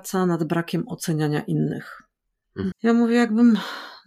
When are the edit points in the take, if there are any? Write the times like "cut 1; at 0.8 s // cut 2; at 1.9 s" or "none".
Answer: cut 1; at 2.7 s